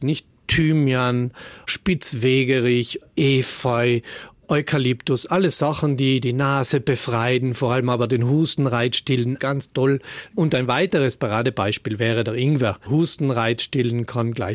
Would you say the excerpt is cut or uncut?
cut